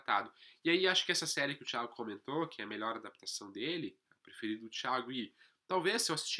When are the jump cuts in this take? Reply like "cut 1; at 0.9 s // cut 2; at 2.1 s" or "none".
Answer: none